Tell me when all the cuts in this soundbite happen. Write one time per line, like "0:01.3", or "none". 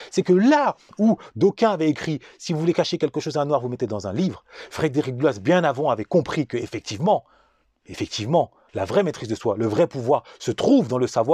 0:08.7